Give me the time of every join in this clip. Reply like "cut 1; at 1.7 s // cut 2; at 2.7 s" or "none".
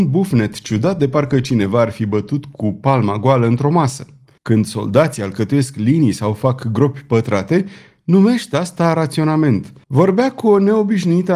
cut 1; at 4.4 s // cut 2; at 9.8 s